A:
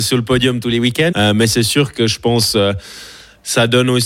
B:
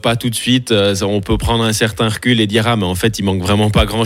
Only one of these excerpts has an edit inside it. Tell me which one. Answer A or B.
A